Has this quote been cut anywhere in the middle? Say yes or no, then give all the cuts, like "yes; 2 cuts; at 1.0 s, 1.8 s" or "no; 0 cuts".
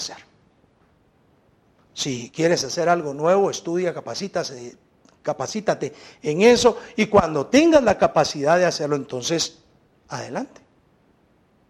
no; 0 cuts